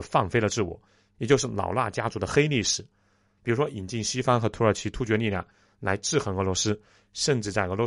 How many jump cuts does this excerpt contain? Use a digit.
2